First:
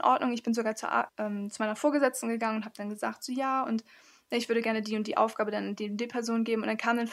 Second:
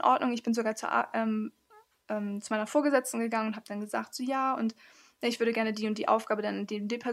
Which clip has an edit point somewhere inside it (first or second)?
first